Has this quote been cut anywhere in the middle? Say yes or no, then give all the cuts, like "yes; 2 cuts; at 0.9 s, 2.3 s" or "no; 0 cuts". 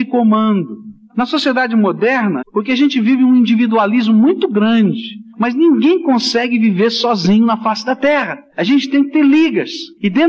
yes; 1 cut; at 2.4 s